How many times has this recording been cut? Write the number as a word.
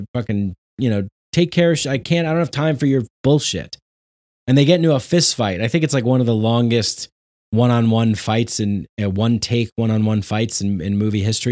zero